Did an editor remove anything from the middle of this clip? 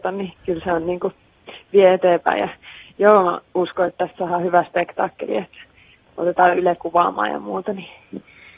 no; 0 cuts

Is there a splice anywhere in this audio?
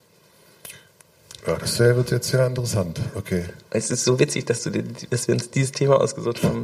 no; 0 cuts

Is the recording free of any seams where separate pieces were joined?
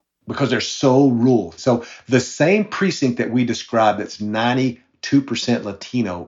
no; 1 cut; at 1.6 s

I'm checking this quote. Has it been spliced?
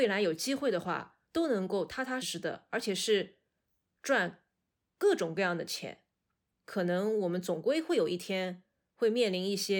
yes; 2 cuts; at 2.2 s, 6.5 s

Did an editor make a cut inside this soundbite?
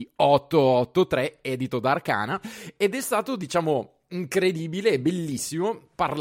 no; 0 cuts

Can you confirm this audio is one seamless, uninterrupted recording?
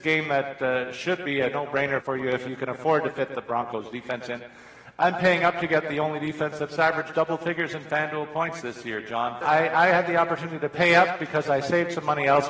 no; 2 cuts; at 2.0 s, 9.4 s

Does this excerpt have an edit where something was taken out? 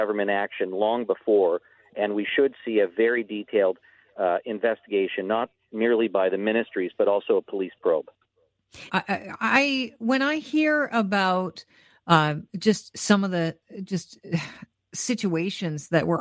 yes; 1 cut; at 8.9 s

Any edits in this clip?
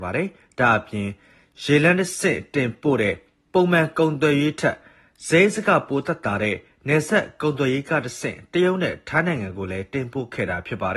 no; 0 cuts

